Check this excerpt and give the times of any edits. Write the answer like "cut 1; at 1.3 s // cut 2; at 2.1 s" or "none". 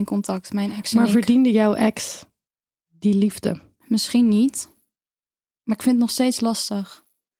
none